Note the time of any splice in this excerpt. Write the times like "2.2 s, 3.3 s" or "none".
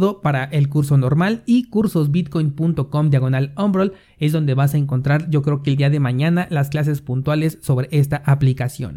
none